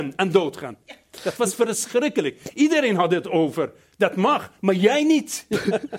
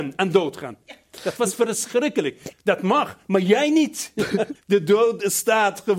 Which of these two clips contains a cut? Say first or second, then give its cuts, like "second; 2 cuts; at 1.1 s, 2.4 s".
second; 2 cuts; at 2.5 s, 4.6 s